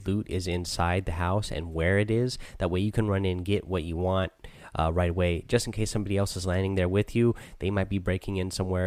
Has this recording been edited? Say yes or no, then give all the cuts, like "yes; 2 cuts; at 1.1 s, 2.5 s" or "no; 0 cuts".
no; 0 cuts